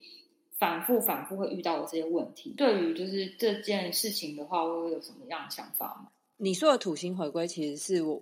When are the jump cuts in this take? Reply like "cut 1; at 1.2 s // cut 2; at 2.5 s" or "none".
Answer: none

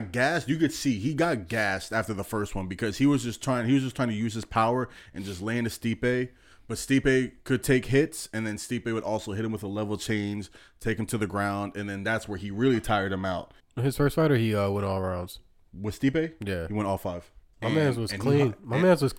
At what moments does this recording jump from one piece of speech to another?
cut 1; at 13.6 s // cut 2; at 17.5 s

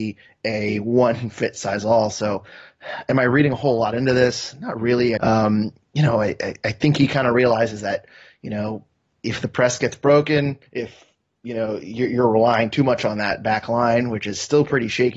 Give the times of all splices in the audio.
cut 1; at 5.2 s // cut 2; at 10.7 s

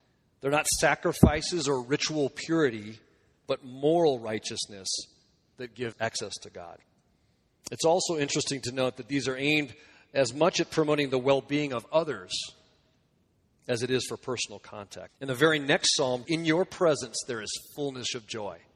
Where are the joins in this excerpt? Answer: cut 1; at 5.9 s // cut 2; at 15.1 s // cut 3; at 16.2 s

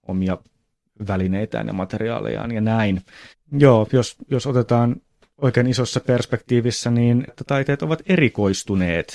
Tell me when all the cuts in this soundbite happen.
cut 1; at 3.3 s // cut 2; at 7.3 s

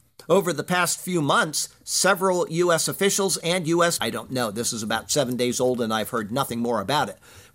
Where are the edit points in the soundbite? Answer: cut 1; at 4.0 s

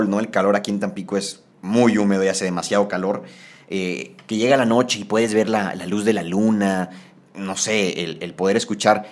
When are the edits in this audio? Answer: cut 1; at 1.5 s

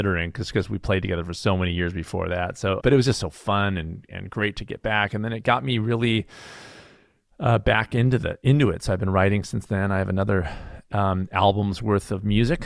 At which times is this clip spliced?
cut 1; at 2.8 s

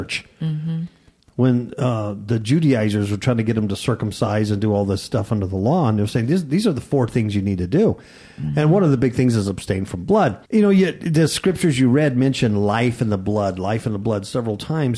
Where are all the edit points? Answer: cut 1; at 10.4 s

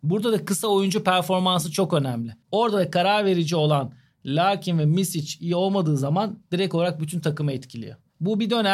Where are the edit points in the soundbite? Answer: cut 1; at 2.4 s

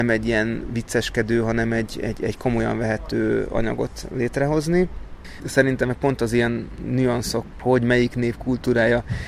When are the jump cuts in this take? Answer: cut 1; at 5.4 s // cut 2; at 7.5 s

